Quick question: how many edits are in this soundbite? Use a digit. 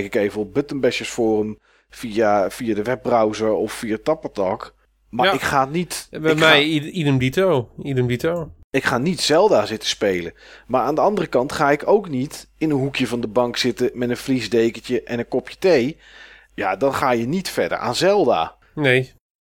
1